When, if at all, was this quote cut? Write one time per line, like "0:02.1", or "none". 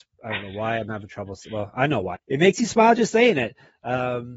0:02.1